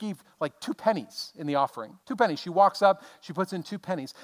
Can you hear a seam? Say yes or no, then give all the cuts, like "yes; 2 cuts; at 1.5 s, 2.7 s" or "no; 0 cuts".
yes; 1 cut; at 2.0 s